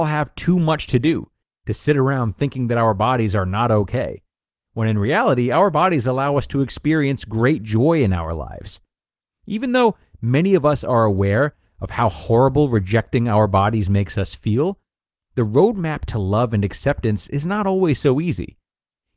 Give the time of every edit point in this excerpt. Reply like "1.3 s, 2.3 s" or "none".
none